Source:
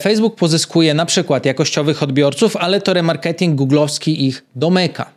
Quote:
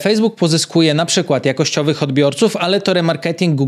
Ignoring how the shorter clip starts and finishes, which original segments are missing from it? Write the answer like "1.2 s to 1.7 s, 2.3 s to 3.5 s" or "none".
none